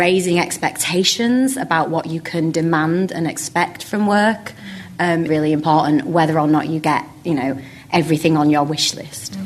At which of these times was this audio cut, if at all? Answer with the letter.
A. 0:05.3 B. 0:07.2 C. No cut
A